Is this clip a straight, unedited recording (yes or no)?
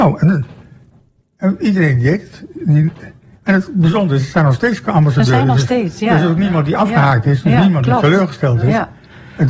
yes